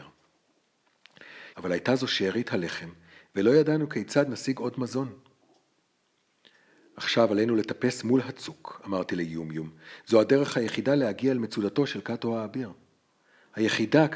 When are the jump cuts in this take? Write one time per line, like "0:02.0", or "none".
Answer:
0:01.5